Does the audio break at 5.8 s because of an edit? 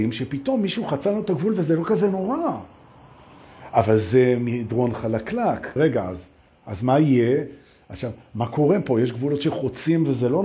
yes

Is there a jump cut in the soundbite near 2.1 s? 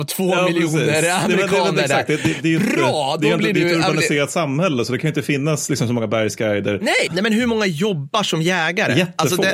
no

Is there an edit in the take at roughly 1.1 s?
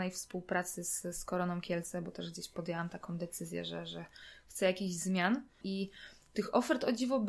no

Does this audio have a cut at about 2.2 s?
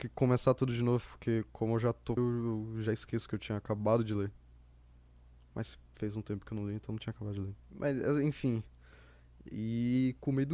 yes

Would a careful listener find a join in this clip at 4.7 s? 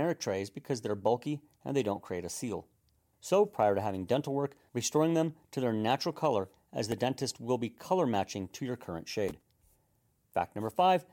yes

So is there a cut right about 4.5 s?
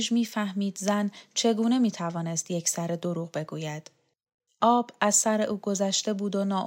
yes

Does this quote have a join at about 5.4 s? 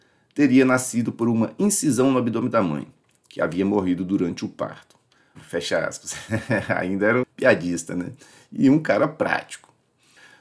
yes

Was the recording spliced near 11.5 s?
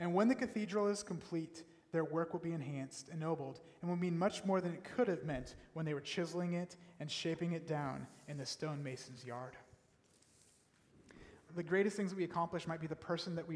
yes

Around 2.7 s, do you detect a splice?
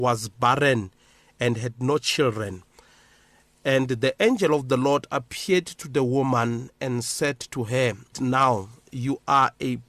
no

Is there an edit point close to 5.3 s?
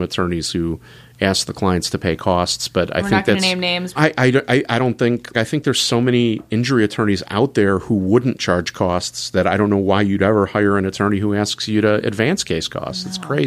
yes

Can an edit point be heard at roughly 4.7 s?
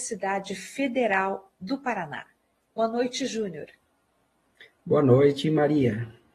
no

